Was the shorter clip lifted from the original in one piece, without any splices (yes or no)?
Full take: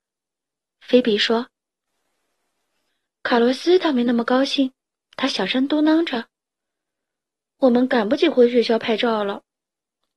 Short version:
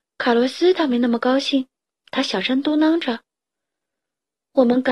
yes